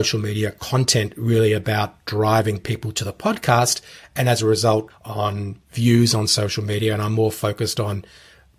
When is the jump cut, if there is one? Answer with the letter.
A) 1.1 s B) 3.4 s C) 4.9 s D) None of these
C